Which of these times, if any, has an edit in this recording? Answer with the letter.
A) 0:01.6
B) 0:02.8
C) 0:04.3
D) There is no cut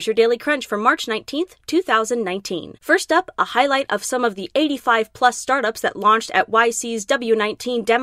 B